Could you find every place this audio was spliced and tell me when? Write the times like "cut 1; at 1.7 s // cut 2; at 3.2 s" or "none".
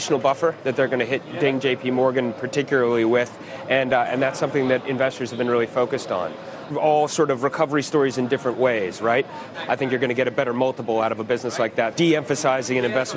cut 1; at 6.7 s // cut 2; at 9.5 s // cut 3; at 11.9 s